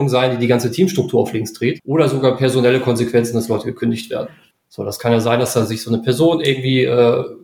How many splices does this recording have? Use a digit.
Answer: 2